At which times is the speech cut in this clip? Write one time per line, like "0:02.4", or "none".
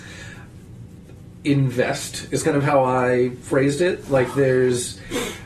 none